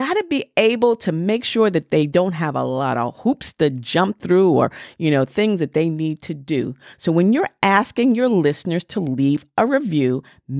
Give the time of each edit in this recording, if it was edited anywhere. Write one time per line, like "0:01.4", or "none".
none